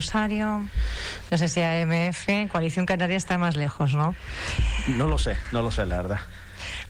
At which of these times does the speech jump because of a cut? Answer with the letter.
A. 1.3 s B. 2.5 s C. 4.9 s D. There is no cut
A